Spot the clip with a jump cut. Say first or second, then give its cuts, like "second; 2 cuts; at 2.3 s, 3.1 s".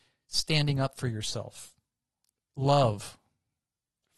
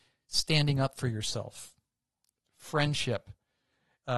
second; 1 cut; at 2.4 s